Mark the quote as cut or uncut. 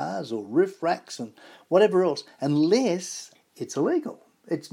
cut